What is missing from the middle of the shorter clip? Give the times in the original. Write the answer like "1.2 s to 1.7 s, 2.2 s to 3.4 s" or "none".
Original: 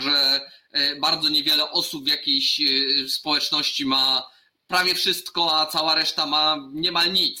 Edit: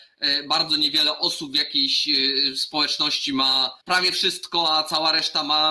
4.3 s to 4.6 s